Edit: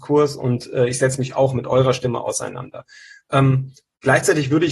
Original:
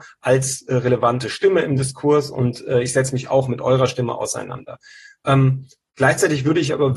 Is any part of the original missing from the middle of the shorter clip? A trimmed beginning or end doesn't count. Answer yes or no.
no